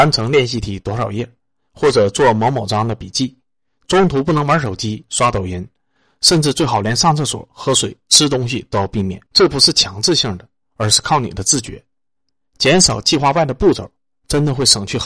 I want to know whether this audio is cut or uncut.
cut